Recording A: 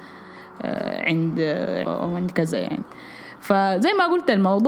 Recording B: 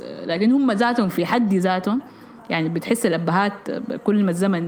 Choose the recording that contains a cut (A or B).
A